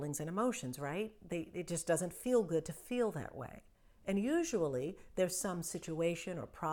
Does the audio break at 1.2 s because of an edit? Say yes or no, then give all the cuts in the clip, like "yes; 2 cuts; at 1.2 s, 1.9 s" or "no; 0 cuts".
no; 0 cuts